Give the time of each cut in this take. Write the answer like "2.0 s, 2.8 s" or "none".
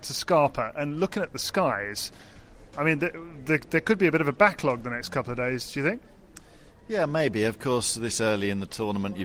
none